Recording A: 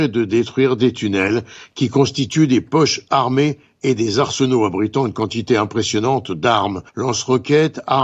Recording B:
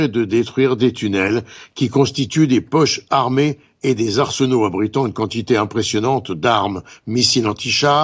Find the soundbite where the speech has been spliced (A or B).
A